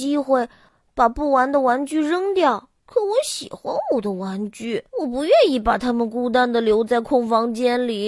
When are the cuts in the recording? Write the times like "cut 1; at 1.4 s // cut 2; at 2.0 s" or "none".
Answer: cut 1; at 2.8 s // cut 2; at 4.9 s